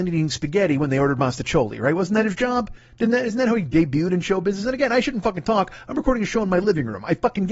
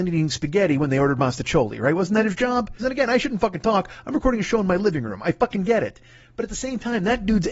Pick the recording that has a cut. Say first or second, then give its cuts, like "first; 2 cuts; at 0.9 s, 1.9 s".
second; 1 cut; at 2.8 s